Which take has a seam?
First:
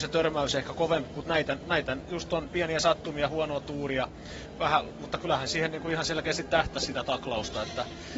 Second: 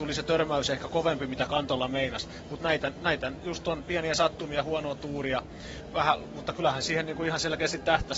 first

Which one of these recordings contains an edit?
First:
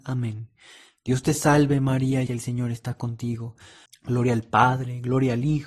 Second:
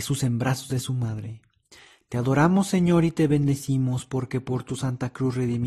first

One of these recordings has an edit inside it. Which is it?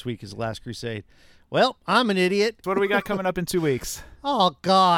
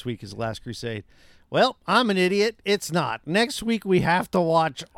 first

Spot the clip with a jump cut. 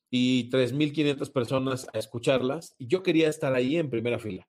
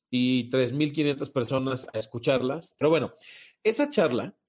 second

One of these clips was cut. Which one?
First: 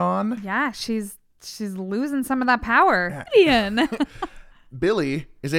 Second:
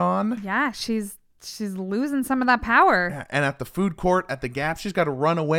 first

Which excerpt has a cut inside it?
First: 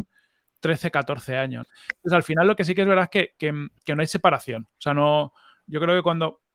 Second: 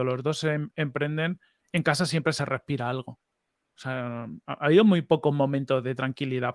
first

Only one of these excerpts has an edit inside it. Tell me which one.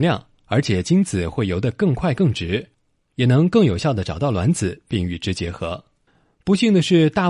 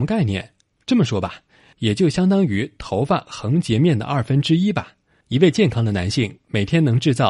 second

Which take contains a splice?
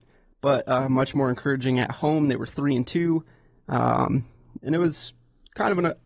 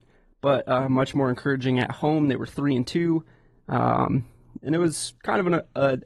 second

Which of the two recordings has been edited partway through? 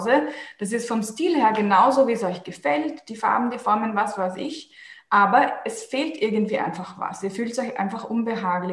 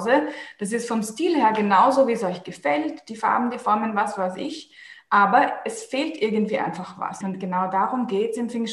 second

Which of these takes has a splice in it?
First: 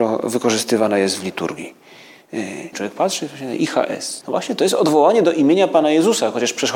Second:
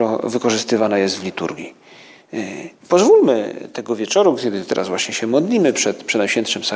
first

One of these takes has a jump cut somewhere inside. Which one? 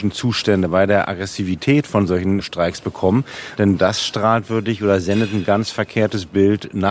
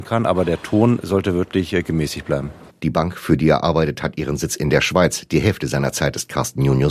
second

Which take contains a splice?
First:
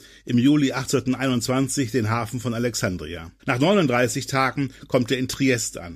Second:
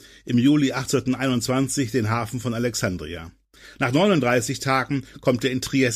first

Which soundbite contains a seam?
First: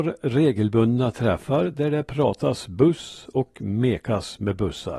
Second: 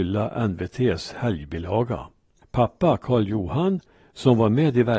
second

